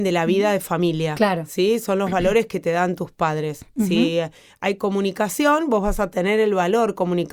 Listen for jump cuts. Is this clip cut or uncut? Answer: uncut